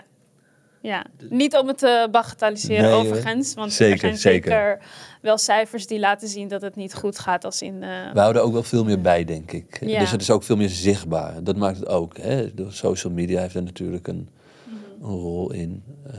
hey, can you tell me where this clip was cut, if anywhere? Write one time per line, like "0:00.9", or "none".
none